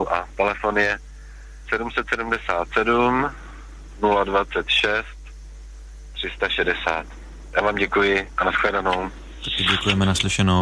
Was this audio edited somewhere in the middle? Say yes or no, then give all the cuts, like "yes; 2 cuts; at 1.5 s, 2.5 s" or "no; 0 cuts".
no; 0 cuts